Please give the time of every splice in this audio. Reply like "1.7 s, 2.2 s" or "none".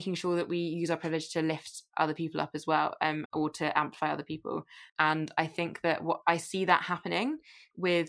3.3 s, 4.9 s